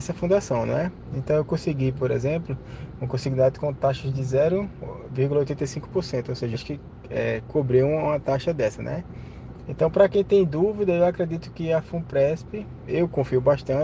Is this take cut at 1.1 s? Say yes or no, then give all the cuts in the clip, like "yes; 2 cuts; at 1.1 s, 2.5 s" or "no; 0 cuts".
no; 1 cut; at 6.5 s